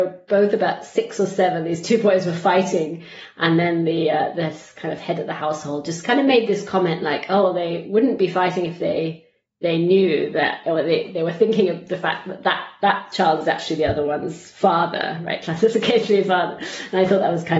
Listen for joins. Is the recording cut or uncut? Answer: uncut